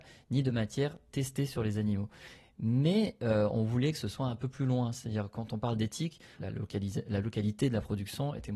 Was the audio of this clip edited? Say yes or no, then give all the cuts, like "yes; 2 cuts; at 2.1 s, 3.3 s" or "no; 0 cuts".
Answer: yes; 1 cut; at 6.4 s